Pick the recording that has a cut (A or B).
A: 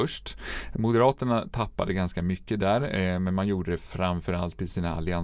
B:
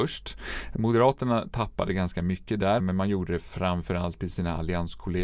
B